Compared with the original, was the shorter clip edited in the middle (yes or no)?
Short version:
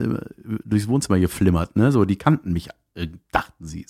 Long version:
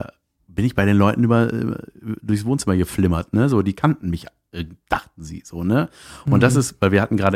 no